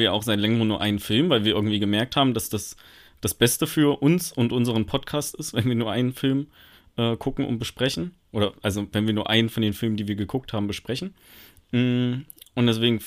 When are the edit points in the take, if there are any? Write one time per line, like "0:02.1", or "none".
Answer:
none